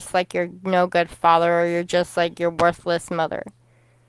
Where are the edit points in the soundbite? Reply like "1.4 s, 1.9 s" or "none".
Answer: none